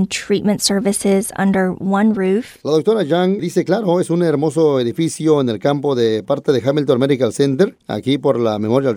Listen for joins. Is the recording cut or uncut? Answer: cut